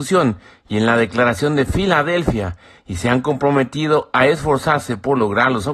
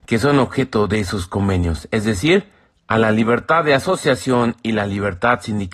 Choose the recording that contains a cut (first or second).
second